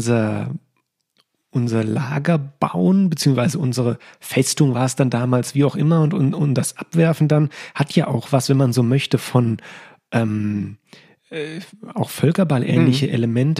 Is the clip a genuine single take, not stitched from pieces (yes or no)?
yes